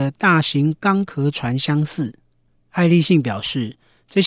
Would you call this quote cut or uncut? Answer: uncut